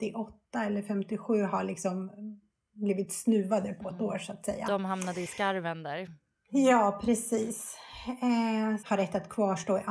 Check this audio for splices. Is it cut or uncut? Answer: cut